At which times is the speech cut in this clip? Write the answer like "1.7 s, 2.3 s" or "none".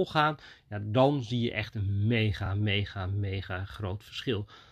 none